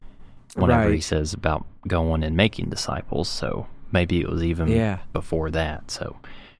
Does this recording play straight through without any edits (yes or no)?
yes